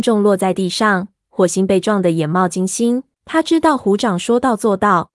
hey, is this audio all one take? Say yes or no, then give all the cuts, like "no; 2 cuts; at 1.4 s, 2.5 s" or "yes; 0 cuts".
no; 1 cut; at 3.1 s